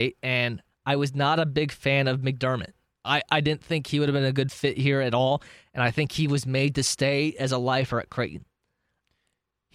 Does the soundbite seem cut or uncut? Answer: uncut